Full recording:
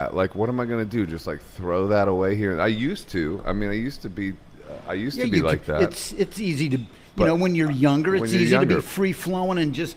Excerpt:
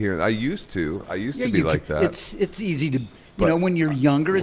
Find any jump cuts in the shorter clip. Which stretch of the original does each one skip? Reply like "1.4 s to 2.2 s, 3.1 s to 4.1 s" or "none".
3.4 s to 4.8 s